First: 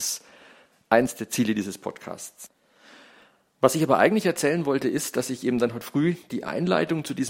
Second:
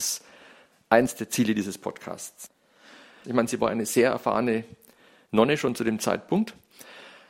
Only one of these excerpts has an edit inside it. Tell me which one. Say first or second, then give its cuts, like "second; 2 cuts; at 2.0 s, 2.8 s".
second; 1 cut; at 3.2 s